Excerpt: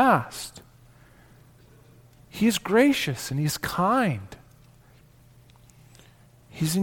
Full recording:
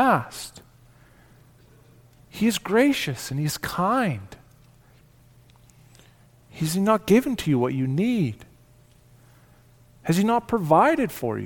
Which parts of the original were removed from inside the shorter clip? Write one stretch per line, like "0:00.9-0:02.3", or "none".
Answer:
none